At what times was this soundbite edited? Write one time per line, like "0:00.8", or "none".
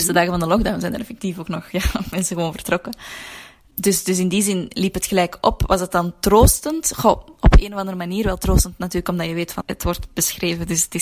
0:09.6